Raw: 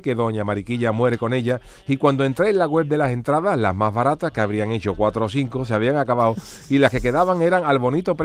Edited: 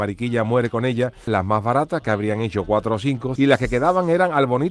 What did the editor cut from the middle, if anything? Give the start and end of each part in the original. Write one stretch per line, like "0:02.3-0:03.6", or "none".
0:01.8-0:03.6
0:05.7-0:06.7